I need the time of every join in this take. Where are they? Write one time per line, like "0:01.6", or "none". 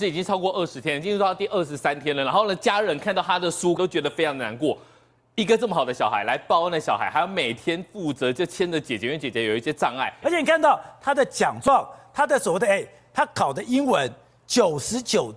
0:03.8
0:10.2